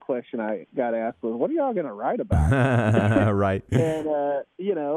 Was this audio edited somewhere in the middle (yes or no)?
no